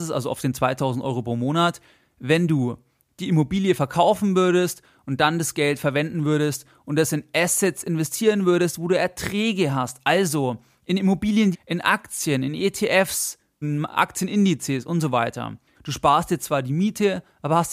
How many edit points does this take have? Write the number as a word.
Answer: three